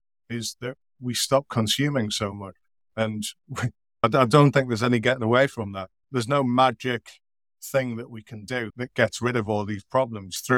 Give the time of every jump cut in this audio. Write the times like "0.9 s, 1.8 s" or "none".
none